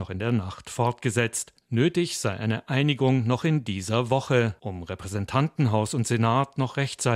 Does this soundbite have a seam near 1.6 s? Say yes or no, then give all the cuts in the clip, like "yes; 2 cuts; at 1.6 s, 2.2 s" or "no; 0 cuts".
no; 1 cut; at 4.6 s